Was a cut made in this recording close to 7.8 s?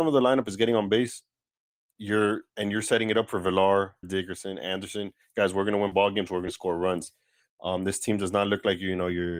no; 1 cut; at 4.0 s

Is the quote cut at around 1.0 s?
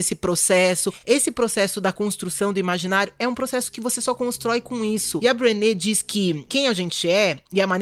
no; 0 cuts

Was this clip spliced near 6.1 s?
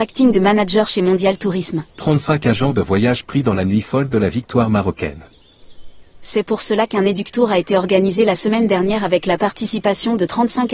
no; 1 cut; at 1.9 s

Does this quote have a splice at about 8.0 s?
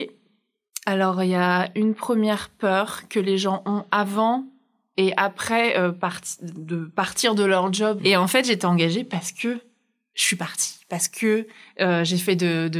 yes; 1 cut; at 8.0 s

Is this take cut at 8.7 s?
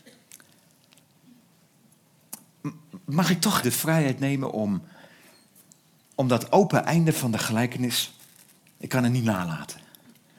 no; 1 cut; at 3.6 s

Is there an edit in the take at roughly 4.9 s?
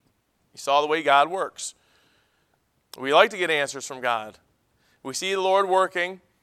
no; 1 cut; at 2.9 s

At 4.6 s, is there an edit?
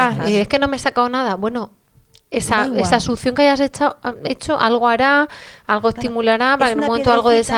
no; 0 cuts

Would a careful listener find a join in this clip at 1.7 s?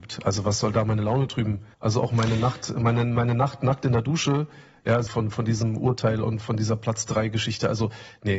yes; 2 cuts; at 1.7 s, 5.1 s

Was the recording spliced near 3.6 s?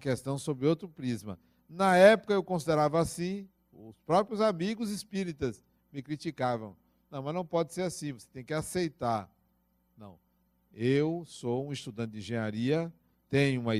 yes; 1 cut; at 3.6 s

